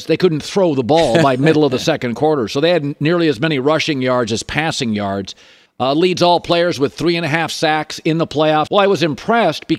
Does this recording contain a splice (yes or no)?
yes